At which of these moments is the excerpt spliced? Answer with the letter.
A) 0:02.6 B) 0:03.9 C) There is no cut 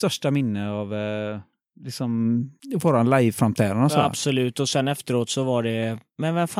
A